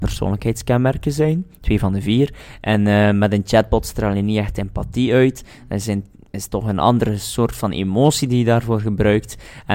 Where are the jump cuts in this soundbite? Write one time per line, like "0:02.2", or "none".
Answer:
none